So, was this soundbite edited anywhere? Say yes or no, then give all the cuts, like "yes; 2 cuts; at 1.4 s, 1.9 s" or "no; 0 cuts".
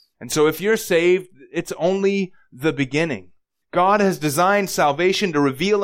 yes; 1 cut; at 3.6 s